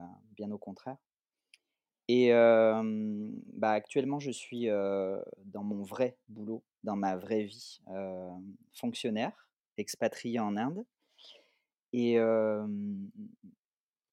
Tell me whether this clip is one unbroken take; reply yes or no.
yes